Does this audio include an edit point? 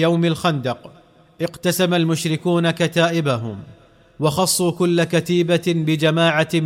no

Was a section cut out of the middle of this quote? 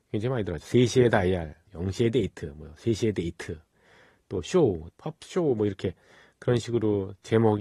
yes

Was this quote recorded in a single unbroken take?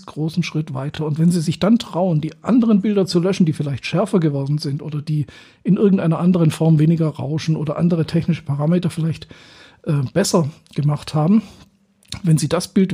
yes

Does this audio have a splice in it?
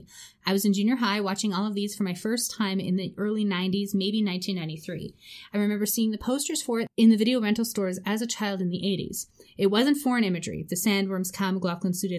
no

